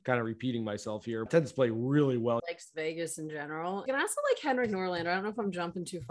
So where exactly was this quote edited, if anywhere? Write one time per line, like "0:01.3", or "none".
0:01.3
0:02.4
0:03.9